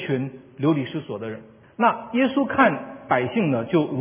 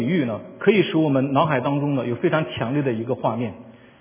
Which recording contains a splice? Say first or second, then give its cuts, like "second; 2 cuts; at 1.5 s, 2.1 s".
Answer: first; 1 cut; at 1.6 s